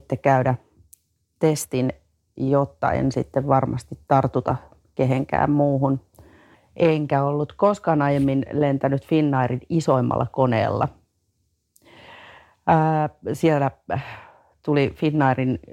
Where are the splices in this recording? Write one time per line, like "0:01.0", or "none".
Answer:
0:06.5